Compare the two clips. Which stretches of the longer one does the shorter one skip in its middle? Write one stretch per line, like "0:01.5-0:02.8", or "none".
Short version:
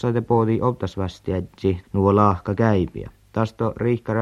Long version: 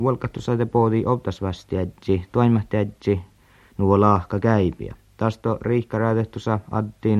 0:02.3-0:03.7